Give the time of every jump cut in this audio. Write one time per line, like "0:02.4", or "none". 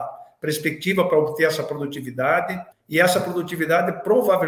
0:02.7